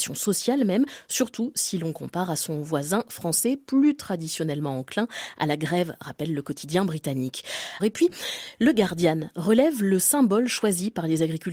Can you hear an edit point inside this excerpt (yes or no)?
yes